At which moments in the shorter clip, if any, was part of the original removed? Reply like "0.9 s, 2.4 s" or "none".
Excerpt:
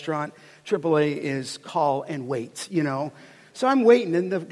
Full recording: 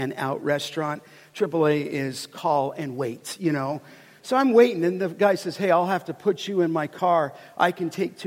none